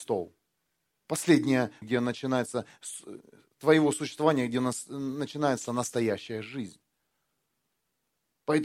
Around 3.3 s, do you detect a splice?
no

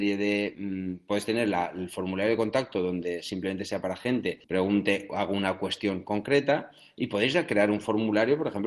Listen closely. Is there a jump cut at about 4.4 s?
yes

